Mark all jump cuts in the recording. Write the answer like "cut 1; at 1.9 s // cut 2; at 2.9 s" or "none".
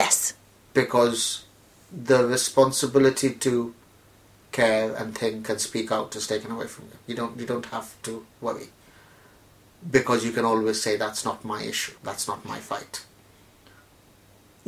cut 1; at 12.0 s